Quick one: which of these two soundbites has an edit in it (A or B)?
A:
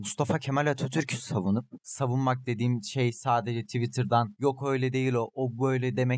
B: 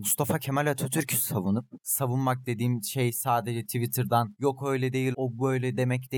B